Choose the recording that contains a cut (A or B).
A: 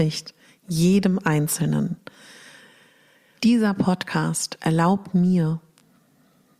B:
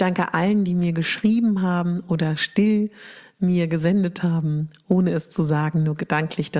A